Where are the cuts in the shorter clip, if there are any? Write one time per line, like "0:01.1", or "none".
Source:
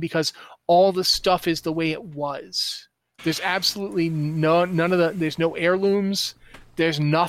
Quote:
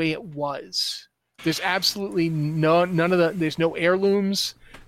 none